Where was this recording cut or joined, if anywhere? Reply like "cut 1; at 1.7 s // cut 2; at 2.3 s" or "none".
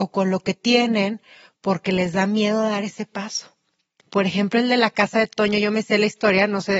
cut 1; at 4.0 s